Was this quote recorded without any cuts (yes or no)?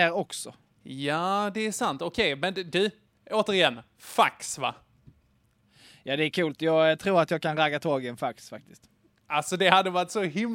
yes